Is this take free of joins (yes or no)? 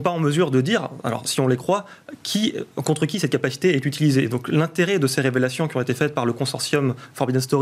yes